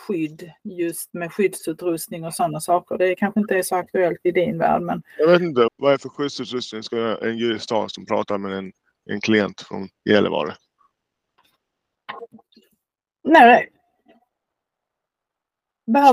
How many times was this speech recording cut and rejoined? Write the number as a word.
one